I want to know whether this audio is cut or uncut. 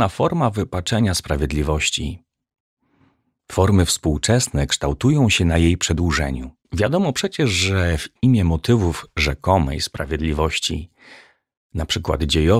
cut